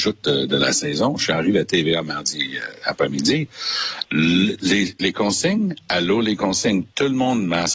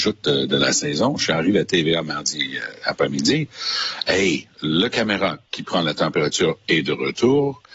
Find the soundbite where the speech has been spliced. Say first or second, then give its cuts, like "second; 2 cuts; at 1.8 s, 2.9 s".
first; 1 cut; at 4.0 s